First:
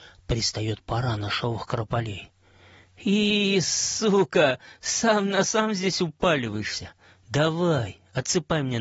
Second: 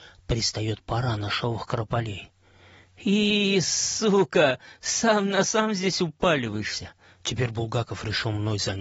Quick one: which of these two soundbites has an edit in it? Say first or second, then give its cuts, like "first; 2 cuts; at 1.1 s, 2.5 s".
second; 1 cut; at 7.2 s